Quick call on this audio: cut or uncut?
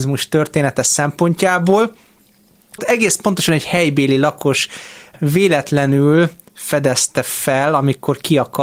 cut